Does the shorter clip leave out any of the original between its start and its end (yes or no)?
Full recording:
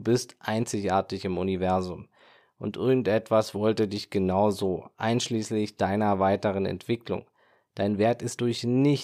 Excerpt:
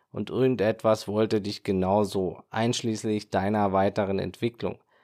no